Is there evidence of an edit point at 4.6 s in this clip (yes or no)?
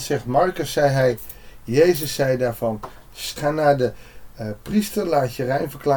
no